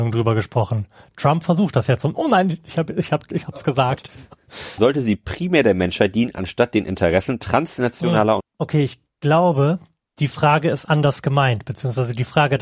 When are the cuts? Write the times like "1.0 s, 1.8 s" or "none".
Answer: 4.8 s, 8.4 s, 10.8 s